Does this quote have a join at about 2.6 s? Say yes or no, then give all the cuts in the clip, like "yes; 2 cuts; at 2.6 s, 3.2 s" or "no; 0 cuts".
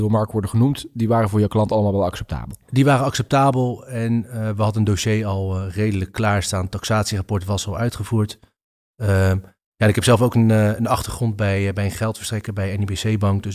no; 0 cuts